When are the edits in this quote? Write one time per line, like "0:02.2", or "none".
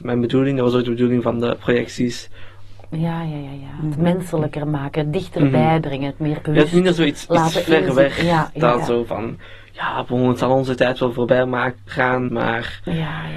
0:02.8
0:12.3